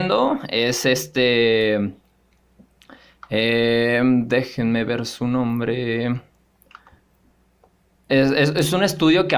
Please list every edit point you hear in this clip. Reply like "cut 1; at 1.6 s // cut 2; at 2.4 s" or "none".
none

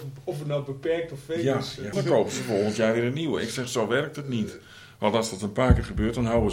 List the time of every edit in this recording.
cut 1; at 1.9 s

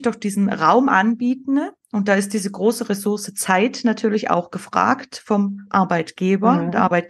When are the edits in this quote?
none

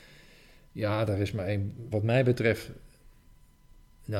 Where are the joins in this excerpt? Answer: cut 1; at 1.9 s

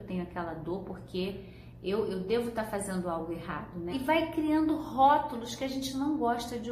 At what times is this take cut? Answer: cut 1; at 3.9 s

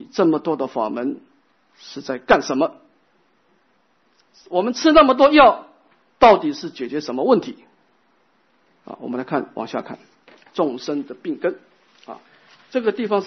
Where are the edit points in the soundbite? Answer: none

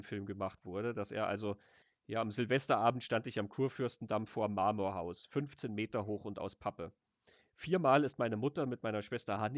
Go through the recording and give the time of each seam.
none

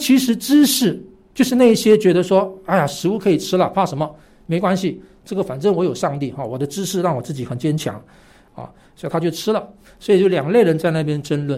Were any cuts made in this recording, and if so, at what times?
cut 1; at 7.5 s // cut 2; at 9.8 s

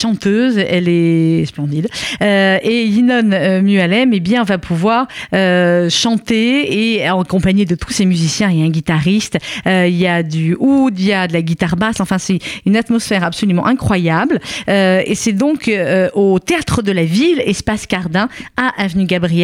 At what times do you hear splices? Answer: none

